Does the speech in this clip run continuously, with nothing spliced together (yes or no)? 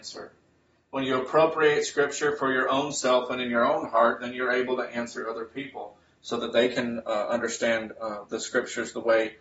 yes